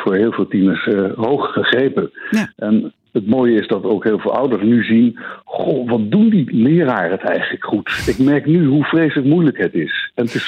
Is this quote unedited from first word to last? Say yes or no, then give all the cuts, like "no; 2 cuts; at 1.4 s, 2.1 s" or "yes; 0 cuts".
yes; 0 cuts